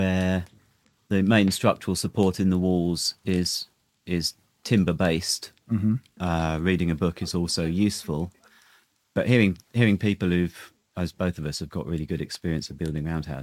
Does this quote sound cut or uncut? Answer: cut